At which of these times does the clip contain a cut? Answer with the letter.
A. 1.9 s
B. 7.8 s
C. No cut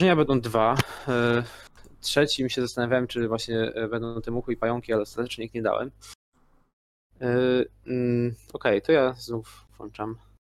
B